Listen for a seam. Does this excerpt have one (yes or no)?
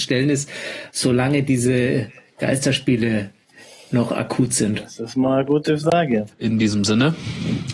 yes